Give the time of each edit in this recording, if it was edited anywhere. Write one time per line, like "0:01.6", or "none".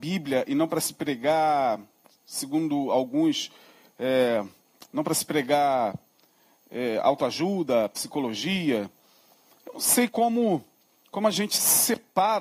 none